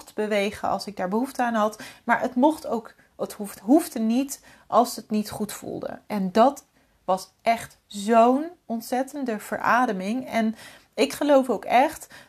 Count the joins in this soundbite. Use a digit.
0